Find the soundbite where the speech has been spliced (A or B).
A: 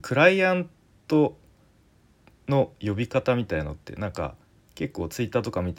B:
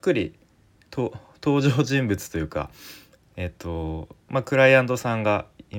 B